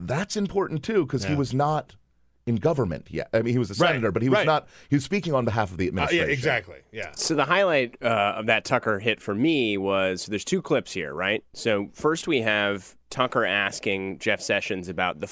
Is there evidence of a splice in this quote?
no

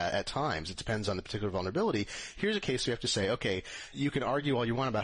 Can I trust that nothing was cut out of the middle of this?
no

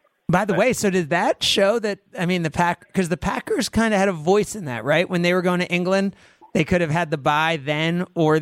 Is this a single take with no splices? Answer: yes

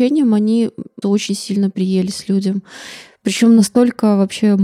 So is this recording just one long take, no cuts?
no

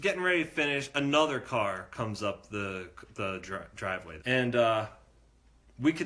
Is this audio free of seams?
no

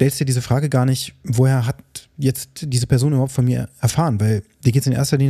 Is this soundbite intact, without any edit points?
yes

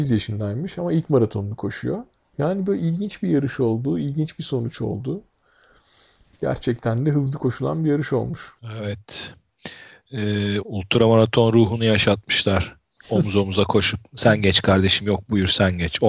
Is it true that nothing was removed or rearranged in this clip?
no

